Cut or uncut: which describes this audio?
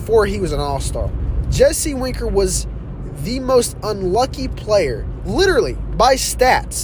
uncut